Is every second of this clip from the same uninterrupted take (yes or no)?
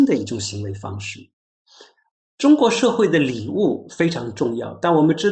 yes